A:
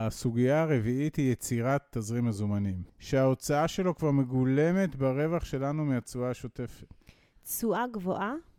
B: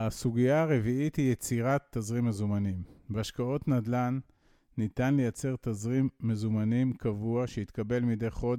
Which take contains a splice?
A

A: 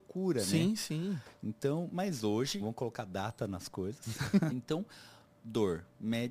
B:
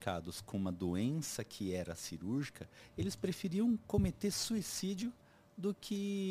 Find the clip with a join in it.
A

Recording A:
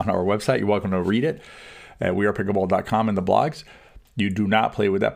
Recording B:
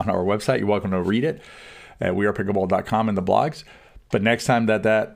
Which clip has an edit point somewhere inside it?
A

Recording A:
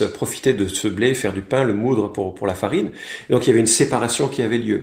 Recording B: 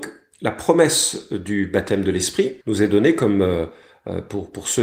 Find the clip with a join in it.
B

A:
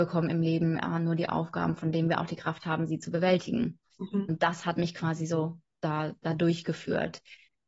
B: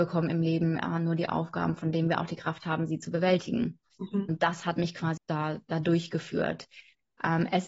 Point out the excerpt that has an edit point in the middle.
B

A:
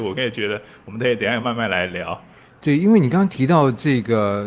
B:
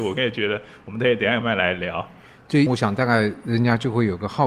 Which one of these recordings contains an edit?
B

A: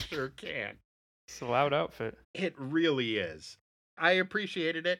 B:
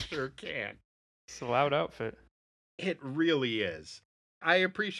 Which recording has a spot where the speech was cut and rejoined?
A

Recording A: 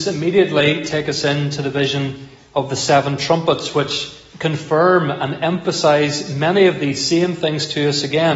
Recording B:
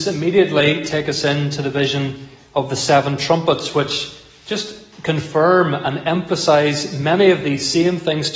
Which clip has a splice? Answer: A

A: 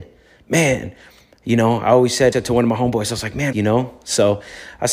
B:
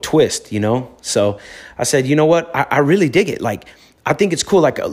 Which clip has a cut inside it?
A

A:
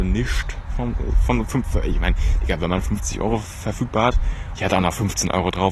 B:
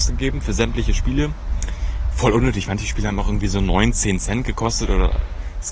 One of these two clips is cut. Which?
A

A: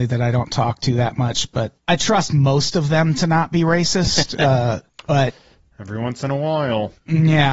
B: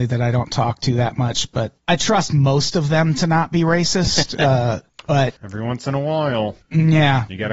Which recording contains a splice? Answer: B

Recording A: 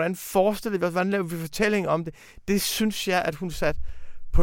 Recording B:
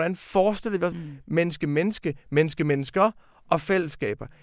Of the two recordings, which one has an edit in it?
B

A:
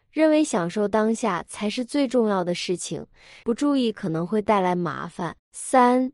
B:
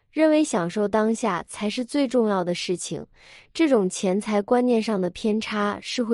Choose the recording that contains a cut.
A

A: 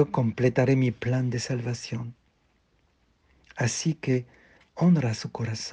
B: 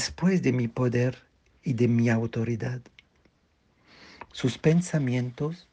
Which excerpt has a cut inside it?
B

